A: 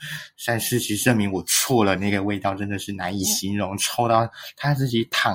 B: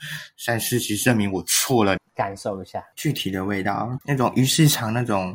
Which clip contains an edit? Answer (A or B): B